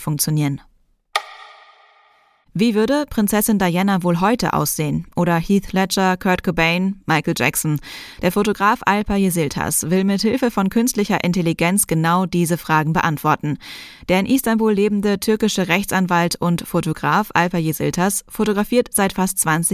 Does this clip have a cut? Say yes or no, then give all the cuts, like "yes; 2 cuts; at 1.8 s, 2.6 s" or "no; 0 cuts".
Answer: no; 0 cuts